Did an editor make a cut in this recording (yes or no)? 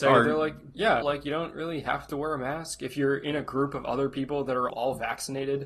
yes